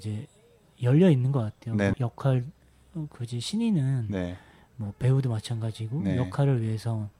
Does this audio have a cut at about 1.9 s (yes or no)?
yes